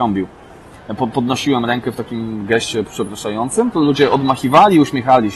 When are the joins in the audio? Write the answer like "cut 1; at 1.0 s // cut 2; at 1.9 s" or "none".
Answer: none